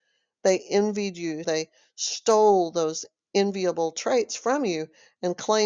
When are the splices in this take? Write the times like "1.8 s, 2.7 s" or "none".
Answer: 1.4 s